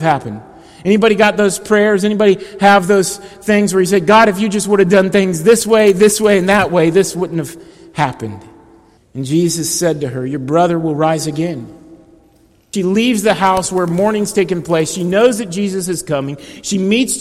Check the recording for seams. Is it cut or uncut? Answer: cut